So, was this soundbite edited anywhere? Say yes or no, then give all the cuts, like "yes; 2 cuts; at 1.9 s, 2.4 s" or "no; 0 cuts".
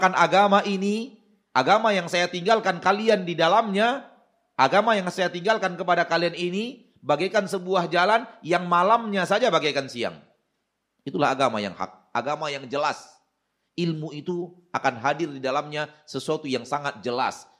no; 0 cuts